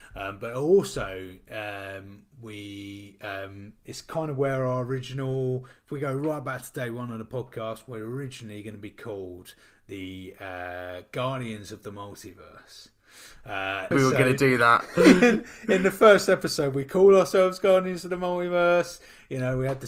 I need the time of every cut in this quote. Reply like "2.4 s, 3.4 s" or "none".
13.9 s